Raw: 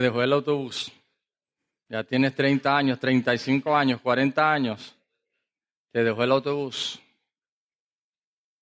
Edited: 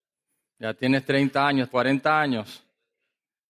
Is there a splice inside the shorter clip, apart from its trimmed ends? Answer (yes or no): yes